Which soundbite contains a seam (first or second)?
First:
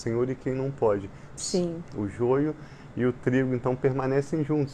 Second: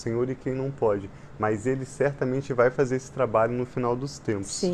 first